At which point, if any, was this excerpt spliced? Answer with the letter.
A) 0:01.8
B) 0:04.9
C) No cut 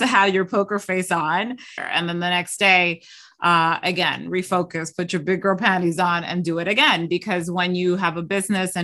A